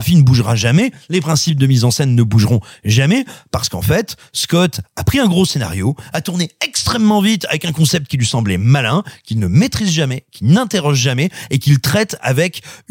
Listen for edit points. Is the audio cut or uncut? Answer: uncut